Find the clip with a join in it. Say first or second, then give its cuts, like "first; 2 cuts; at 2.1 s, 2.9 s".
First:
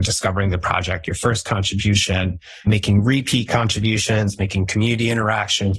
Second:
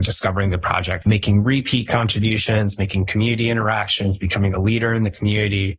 second; 1 cut; at 1.0 s